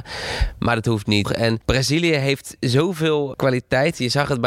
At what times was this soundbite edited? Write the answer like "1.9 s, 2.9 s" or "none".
1.2 s, 3.3 s